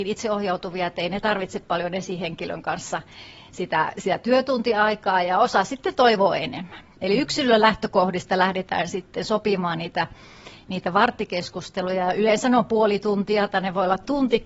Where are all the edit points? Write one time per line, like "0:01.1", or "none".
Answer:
none